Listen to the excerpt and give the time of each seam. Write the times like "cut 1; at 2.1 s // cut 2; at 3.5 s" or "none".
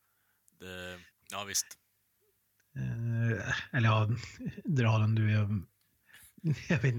cut 1; at 1.2 s